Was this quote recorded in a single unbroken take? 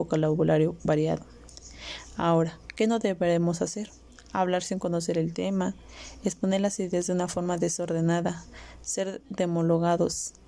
yes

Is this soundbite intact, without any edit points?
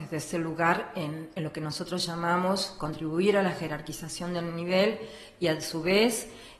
yes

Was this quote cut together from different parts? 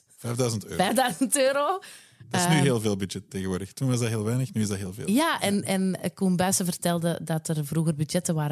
no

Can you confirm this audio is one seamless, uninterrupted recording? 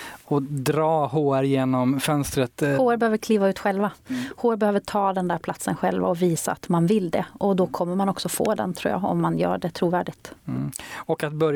yes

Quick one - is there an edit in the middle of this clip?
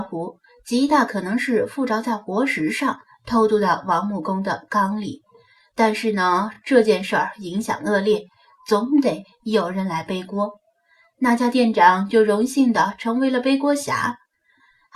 no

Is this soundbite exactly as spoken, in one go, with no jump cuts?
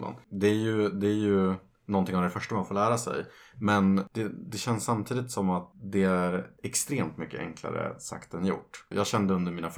yes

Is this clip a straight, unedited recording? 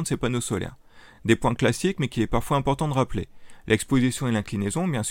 yes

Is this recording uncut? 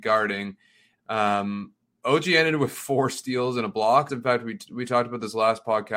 no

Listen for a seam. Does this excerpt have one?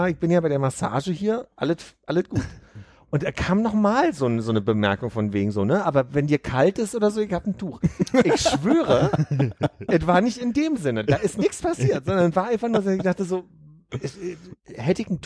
no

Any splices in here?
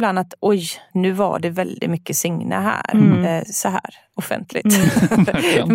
yes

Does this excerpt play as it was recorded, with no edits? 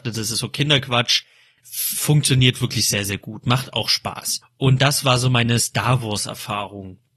yes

